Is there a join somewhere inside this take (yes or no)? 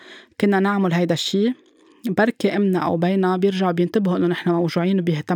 no